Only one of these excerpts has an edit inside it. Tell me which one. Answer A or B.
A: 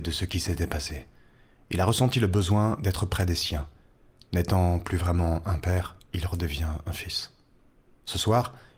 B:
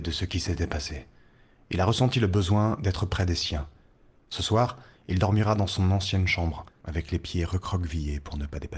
B